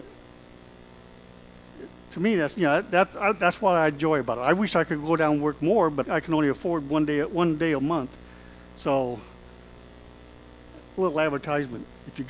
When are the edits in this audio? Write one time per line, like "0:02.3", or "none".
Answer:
0:02.5
0:06.0